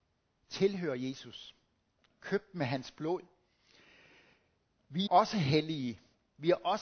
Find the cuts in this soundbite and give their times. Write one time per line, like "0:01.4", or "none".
0:05.1